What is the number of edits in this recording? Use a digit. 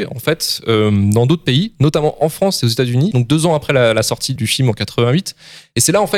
2